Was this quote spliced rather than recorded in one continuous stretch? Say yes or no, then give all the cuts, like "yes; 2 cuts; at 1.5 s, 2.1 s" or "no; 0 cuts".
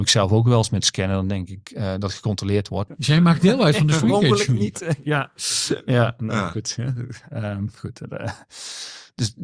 yes; 1 cut; at 2.9 s